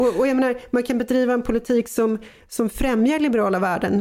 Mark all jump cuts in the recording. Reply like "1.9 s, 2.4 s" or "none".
none